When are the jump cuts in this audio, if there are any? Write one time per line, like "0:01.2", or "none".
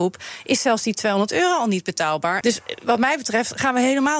0:02.4